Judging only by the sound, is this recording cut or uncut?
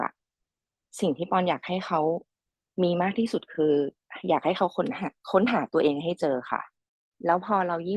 uncut